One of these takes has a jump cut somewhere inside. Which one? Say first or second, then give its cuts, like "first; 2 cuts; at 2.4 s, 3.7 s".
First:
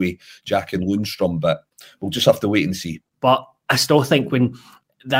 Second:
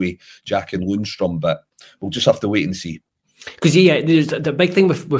first; 1 cut; at 3.1 s